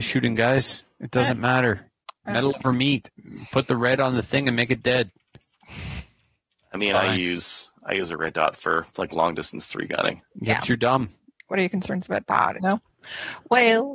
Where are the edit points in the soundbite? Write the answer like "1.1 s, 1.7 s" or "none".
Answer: 11.4 s, 12.6 s